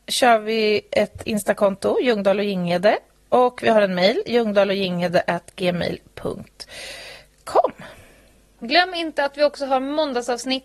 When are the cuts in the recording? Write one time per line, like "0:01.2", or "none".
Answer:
0:08.6